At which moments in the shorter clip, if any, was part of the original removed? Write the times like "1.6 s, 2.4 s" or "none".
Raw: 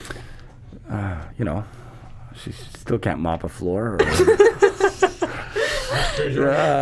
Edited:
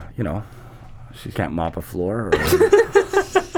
1.3 s